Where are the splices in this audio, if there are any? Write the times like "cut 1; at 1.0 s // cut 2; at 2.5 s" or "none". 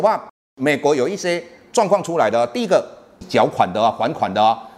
cut 1; at 3.2 s